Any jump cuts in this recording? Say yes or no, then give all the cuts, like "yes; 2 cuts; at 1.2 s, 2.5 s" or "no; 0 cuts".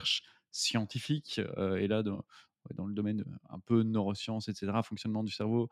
no; 0 cuts